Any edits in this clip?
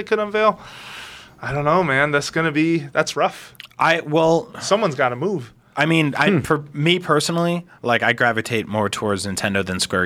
no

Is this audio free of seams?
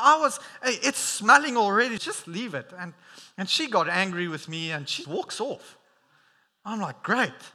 no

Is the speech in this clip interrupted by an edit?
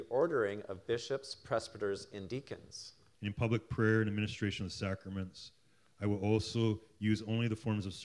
yes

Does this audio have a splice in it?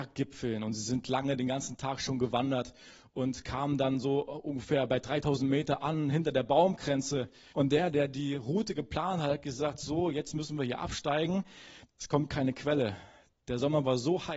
yes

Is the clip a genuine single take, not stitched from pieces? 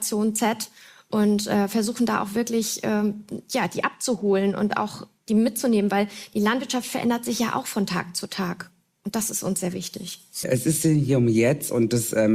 no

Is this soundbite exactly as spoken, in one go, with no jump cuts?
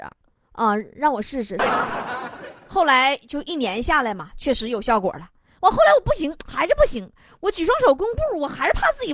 no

